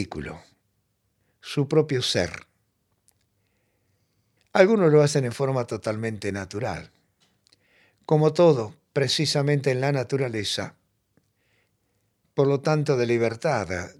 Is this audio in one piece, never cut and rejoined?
no; 2 cuts; at 4.4 s, 12.2 s

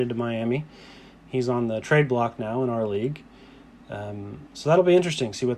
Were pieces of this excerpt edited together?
no; 0 cuts

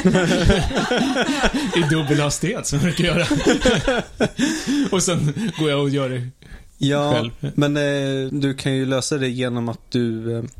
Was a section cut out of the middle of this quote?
yes; 1 cut; at 8.3 s

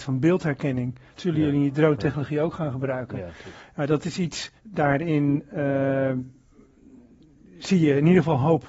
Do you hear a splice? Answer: yes; 1 cut; at 4.6 s

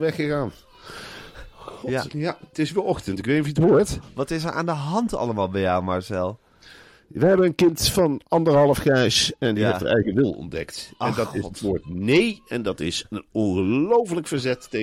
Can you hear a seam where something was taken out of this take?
yes; 1 cut; at 2.1 s

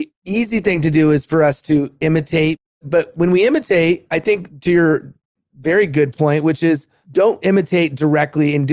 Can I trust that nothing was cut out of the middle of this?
yes; 0 cuts

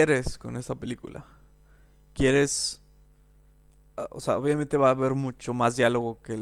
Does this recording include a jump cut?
no; 0 cuts

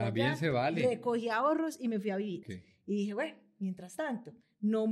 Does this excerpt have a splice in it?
yes; 1 cut; at 2.4 s

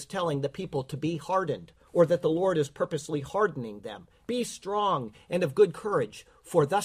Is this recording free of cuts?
no; 1 cut; at 4.3 s

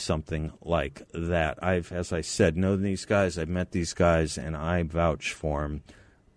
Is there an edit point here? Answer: no; 0 cuts

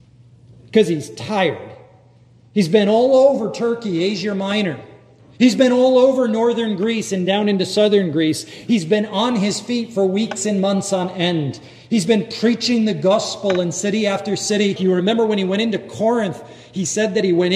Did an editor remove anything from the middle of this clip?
yes; 1 cut; at 14.8 s

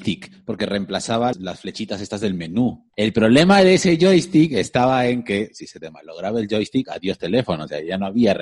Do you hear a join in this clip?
yes; 1 cut; at 1.3 s

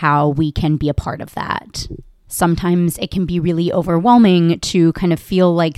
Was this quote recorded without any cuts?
yes; 0 cuts

